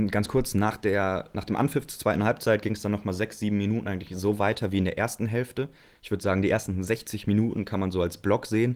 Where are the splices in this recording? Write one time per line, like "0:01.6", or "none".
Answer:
none